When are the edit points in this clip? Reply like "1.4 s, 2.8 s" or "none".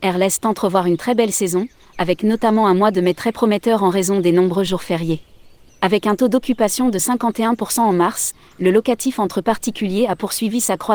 5.7 s